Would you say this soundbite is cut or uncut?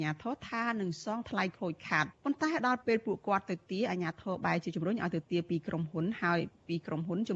cut